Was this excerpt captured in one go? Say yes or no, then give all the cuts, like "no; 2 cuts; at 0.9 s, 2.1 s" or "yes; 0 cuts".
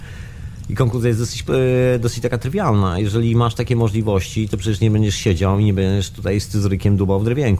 yes; 0 cuts